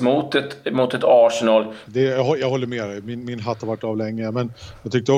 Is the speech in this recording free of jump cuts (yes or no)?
no